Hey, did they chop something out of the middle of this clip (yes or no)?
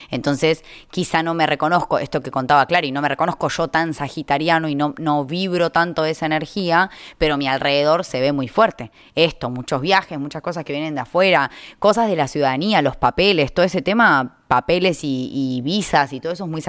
no